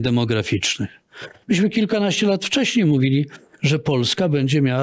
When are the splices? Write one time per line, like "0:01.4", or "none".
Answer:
0:01.4